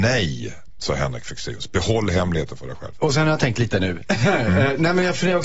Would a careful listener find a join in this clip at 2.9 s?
yes; 1 cut; at 2.9 s

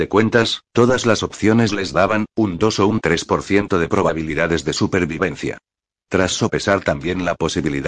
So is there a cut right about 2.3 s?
yes; 1 cut; at 2.3 s

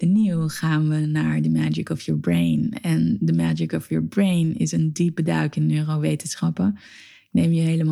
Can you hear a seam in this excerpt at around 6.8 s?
no; 0 cuts

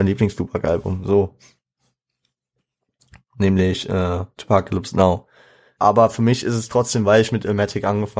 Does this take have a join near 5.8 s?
yes; 1 cut; at 5.8 s

